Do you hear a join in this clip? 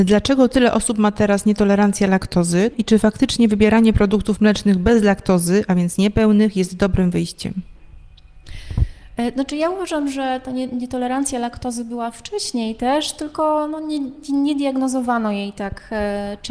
yes; 1 cut; at 2.7 s

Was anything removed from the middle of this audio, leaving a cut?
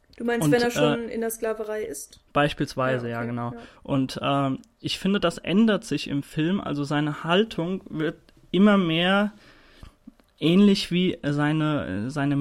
no; 0 cuts

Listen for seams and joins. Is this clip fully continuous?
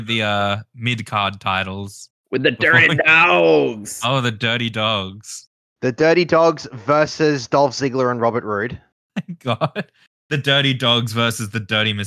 yes; 0 cuts

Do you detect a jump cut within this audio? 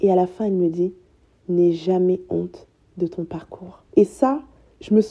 yes; 1 cut; at 3.9 s

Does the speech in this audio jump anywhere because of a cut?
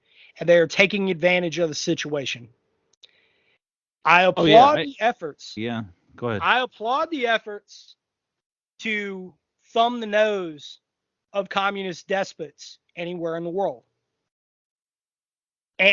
yes; 1 cut; at 5.6 s

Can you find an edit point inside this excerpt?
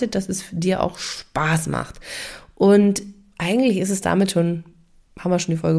no; 0 cuts

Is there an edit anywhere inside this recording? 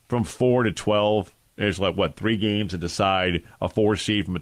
no; 0 cuts

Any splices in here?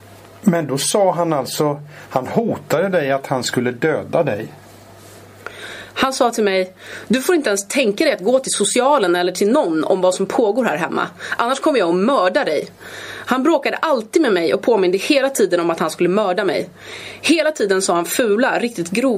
no; 0 cuts

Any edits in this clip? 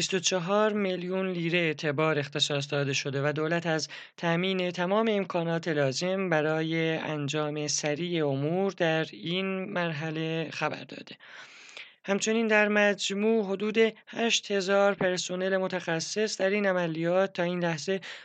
no; 0 cuts

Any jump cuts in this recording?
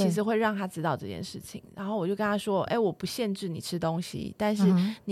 no; 0 cuts

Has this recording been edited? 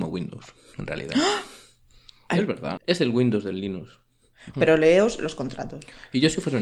yes; 2 cuts; at 2.8 s, 4.5 s

